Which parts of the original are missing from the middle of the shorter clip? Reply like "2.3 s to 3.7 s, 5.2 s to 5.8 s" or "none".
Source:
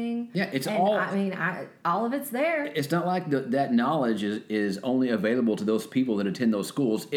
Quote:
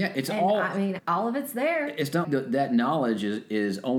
1.4 s to 1.8 s, 3.0 s to 3.2 s